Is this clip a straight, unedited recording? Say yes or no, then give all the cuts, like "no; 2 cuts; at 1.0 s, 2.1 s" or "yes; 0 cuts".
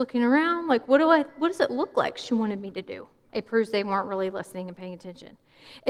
no; 1 cut; at 3.3 s